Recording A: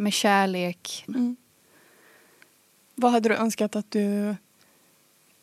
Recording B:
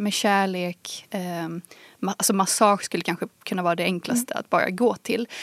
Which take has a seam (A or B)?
A